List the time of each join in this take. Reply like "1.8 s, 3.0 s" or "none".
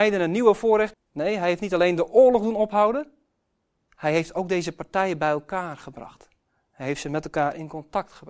0.9 s